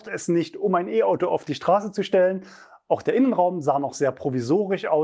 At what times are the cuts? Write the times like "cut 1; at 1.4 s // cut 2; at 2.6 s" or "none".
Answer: none